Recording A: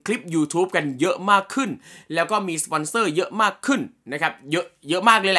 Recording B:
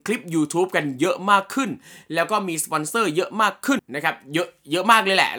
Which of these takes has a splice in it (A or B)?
B